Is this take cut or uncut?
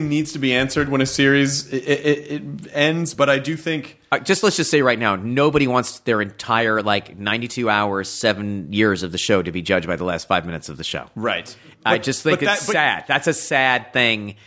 uncut